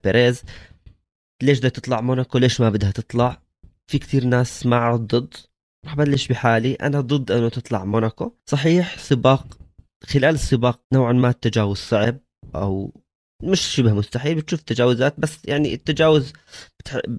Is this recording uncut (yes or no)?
no